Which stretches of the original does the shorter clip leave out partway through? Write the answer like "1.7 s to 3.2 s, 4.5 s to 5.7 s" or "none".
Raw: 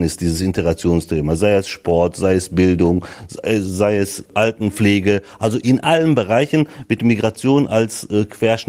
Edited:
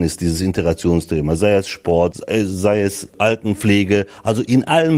2.1 s to 3.3 s